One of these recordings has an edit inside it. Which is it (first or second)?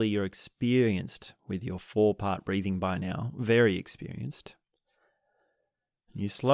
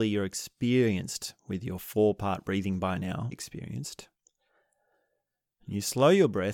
second